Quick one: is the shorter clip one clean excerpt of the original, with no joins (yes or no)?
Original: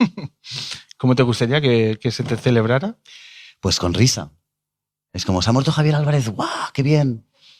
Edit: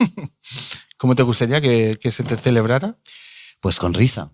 yes